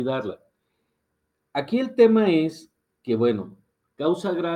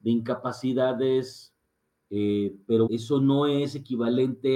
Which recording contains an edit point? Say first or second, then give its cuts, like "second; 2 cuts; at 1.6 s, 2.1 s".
second; 1 cut; at 2.9 s